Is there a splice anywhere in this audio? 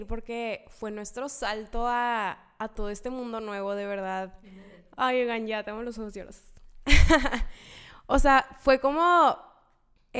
no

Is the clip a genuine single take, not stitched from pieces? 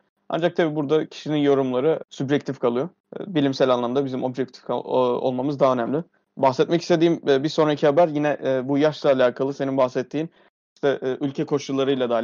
yes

